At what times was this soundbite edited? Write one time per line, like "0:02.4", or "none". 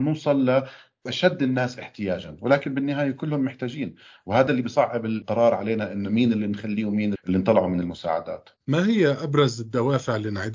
0:07.1
0:08.6